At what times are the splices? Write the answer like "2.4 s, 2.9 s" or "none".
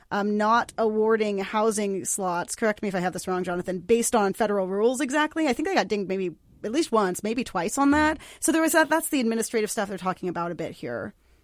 none

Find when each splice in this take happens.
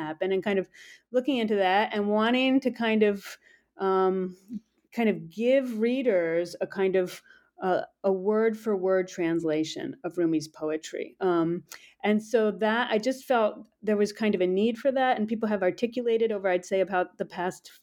none

